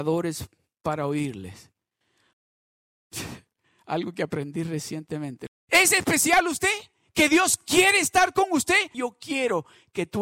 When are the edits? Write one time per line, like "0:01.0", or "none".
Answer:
0:02.3
0:05.5
0:08.9